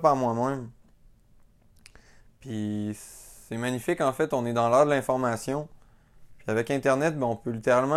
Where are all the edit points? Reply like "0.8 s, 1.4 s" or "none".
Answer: none